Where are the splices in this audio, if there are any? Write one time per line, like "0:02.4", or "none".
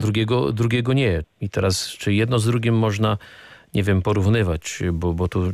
0:01.2